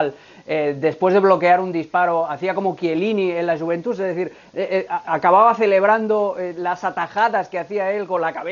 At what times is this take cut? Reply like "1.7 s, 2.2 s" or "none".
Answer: none